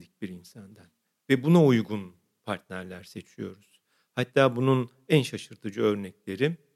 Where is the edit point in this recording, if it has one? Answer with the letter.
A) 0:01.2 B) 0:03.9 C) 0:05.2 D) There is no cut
A